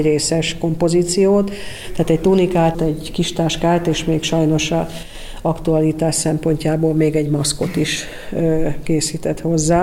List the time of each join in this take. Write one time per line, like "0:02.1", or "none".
0:02.7